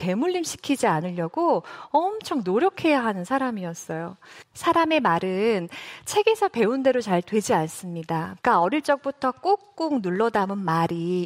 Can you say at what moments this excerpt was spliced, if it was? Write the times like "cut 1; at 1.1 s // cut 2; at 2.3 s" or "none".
cut 1; at 4.4 s // cut 2; at 8.4 s